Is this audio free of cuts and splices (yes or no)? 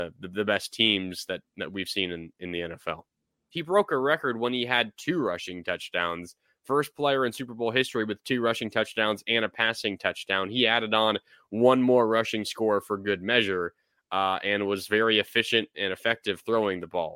no